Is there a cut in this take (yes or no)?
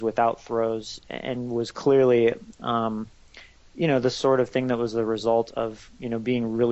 yes